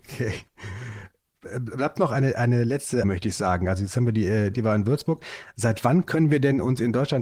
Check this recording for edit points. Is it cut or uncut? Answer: cut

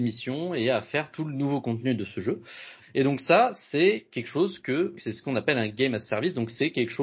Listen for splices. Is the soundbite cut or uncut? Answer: cut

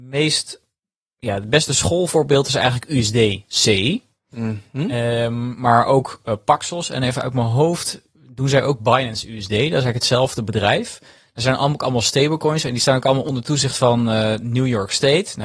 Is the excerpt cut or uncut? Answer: uncut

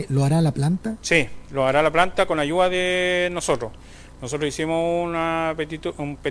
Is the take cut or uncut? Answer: uncut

